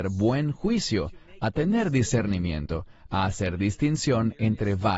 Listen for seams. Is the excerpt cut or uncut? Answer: uncut